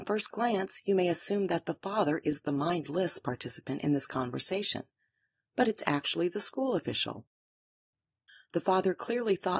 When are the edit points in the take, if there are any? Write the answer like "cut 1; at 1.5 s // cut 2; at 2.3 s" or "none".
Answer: none